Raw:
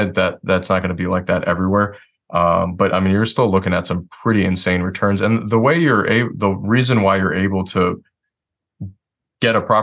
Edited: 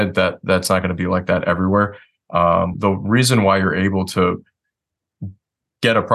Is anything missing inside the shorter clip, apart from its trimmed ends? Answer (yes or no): yes